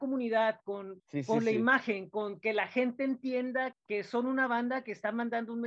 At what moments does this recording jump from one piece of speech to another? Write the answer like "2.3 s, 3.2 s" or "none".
1.0 s, 3.7 s

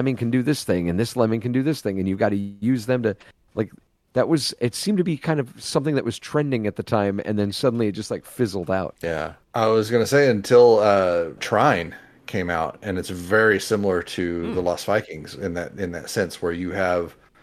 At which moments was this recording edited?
9.0 s

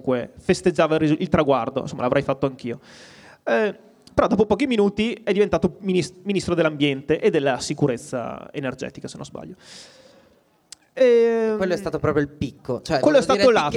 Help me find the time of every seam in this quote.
none

